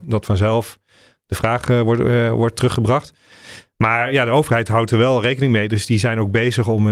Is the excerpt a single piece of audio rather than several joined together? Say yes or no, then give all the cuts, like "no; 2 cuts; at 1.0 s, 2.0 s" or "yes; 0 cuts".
yes; 0 cuts